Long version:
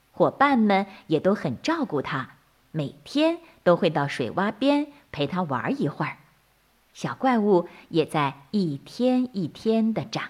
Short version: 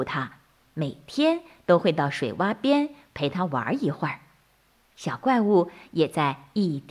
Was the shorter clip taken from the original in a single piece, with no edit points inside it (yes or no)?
yes